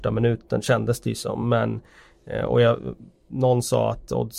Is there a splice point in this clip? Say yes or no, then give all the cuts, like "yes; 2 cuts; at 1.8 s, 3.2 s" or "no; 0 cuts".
no; 0 cuts